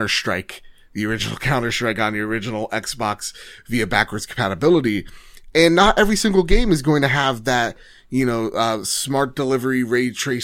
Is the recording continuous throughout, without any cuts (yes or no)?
yes